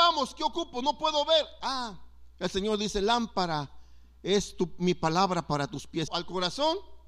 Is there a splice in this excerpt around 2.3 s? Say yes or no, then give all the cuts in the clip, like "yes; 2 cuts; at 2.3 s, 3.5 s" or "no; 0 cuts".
no; 1 cut; at 6.1 s